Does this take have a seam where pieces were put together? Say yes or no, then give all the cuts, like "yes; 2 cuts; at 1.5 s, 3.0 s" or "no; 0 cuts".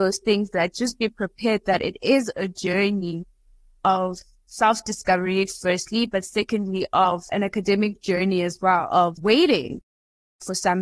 no; 0 cuts